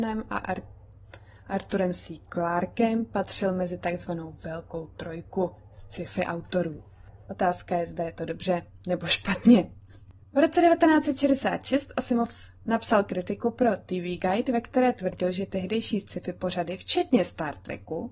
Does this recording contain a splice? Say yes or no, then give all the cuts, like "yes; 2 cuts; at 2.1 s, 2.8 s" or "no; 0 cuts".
yes; 1 cut; at 7.3 s